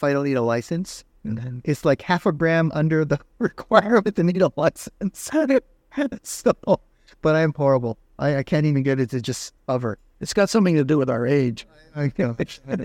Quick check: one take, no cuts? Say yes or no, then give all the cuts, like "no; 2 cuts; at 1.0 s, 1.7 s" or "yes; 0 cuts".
yes; 0 cuts